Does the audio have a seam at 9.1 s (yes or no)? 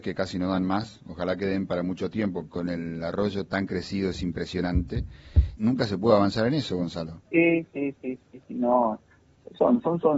no